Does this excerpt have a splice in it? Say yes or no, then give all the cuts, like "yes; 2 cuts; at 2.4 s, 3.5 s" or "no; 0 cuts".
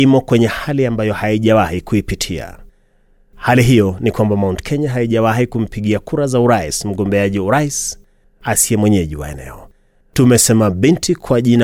no; 0 cuts